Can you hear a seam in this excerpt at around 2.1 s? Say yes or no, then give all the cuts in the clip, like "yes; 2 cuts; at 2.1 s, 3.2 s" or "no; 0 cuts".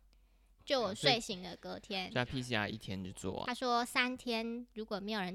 no; 1 cut; at 3.4 s